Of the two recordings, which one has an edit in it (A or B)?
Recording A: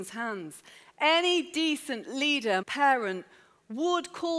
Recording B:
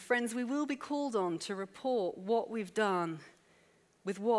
A